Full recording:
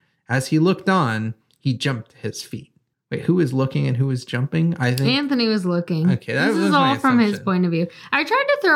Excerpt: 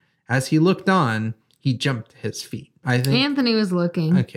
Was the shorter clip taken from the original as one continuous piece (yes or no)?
no